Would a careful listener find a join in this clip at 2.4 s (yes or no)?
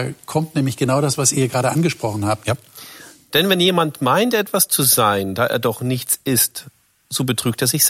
yes